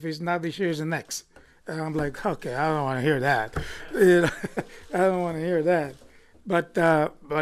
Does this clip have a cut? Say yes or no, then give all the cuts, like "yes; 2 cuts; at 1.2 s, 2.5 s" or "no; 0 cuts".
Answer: no; 0 cuts